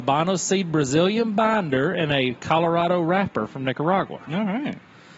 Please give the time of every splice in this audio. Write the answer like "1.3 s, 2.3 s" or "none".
none